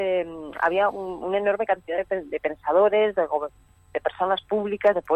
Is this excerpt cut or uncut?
uncut